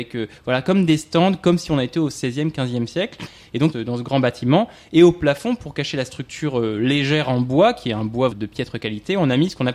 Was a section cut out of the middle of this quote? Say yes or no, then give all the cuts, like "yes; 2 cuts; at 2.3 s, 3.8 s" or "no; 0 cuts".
yes; 2 cuts; at 3.7 s, 8.3 s